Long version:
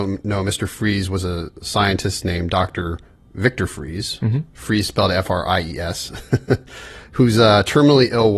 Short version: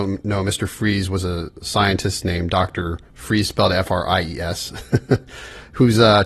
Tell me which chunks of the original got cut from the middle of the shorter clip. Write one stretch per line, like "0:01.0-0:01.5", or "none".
0:03.1-0:04.5